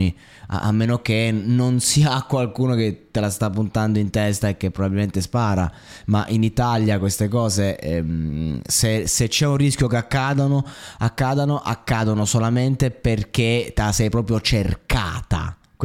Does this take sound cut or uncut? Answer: uncut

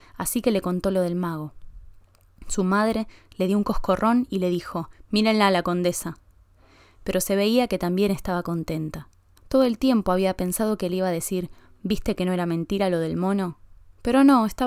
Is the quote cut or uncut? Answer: cut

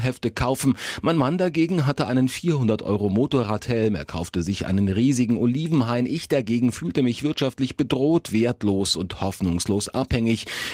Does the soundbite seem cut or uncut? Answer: uncut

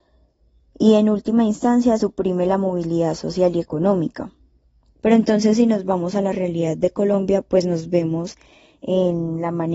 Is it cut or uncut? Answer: cut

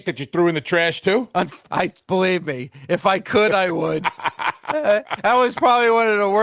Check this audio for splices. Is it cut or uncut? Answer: cut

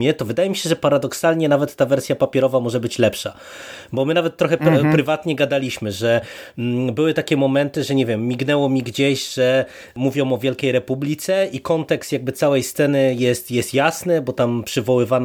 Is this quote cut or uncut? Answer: uncut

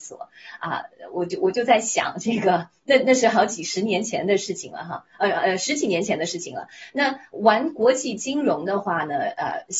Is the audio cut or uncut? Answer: uncut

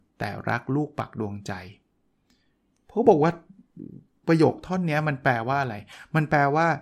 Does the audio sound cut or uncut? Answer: uncut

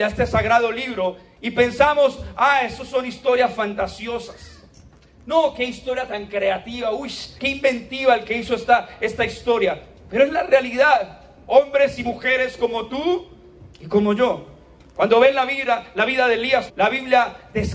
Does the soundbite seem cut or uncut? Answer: cut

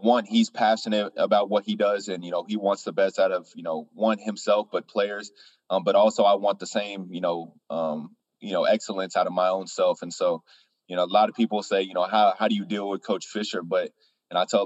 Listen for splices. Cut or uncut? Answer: uncut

